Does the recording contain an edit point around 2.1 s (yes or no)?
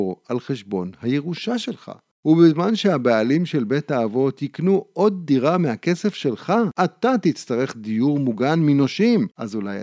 no